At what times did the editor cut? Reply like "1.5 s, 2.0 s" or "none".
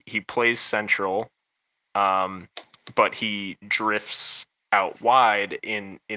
none